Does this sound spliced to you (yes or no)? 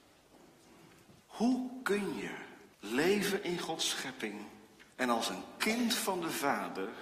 yes